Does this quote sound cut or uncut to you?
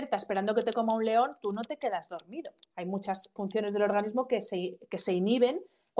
cut